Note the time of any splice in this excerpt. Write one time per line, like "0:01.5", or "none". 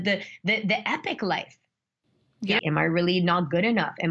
0:02.6